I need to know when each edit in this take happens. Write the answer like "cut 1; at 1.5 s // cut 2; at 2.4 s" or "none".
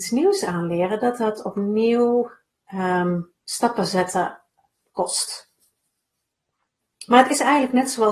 none